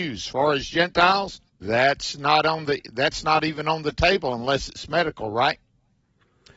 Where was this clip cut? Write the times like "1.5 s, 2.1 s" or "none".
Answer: 1.5 s